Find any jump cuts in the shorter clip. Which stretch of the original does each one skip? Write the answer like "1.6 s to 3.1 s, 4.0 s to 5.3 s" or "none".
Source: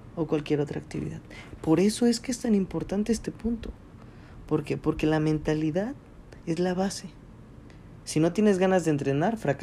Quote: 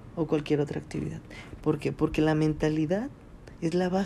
1.6 s to 4.4 s